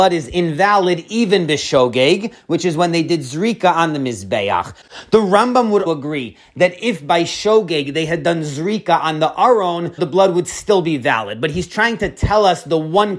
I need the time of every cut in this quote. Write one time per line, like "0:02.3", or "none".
0:05.9
0:10.0